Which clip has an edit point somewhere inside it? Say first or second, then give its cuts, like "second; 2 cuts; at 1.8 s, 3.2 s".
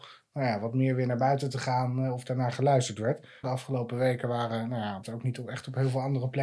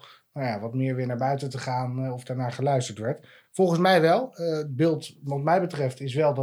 first; 2 cuts; at 3.4 s, 5.0 s